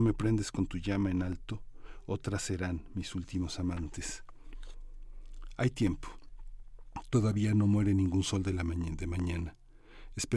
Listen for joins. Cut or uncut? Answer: uncut